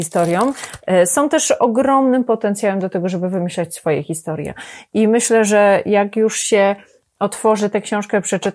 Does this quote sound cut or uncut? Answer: uncut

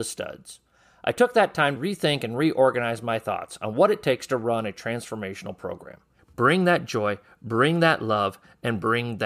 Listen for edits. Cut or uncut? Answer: cut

